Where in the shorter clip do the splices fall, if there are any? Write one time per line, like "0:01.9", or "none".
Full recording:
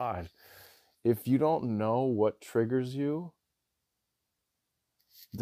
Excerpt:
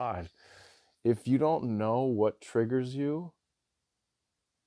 none

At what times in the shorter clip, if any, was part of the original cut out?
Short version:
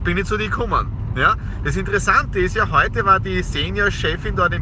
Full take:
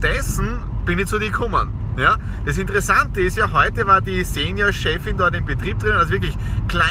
none

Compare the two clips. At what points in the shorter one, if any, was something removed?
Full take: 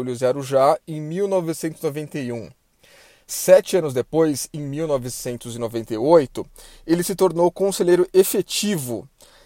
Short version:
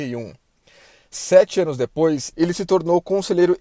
0:02.3

